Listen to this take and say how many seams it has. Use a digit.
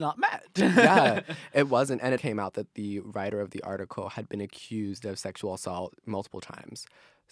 1